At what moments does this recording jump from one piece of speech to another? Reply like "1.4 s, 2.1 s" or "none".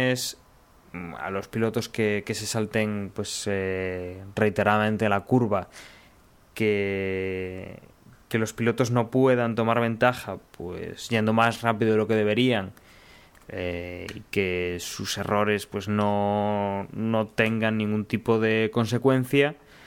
none